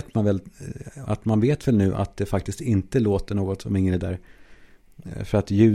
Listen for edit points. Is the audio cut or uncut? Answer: cut